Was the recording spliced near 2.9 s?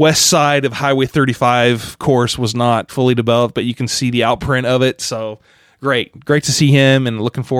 yes; 1 cut; at 2.9 s

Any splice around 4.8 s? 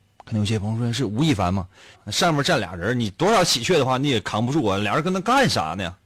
no; 1 cut; at 1.9 s

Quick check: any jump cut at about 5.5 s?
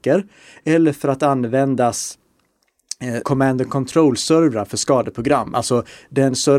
no; 1 cut; at 3.2 s

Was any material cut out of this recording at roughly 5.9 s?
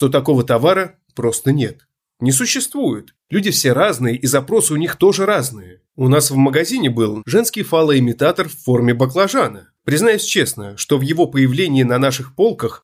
yes; 3 cuts; at 5.9 s, 7.2 s, 9.8 s

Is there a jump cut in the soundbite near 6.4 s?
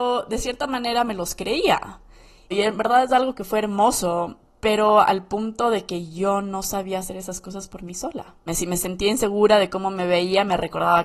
no; 2 cuts; at 2.5 s, 8.5 s

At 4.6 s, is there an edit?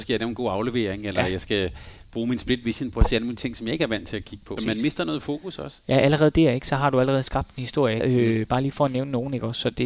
yes; 2 cuts; at 4.6 s, 8.0 s

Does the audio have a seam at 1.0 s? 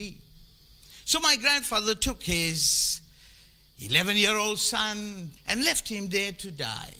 no; 1 cut; at 5.4 s

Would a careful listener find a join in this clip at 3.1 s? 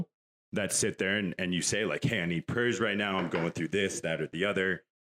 no; 0 cuts

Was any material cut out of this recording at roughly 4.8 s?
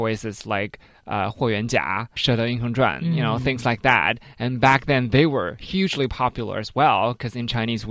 no; 1 cut; at 2.2 s

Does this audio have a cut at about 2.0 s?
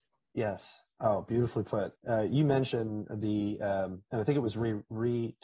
yes; 1 cut; at 2.0 s

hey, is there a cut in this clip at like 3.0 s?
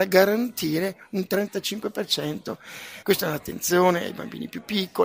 yes; 1 cut; at 3.0 s

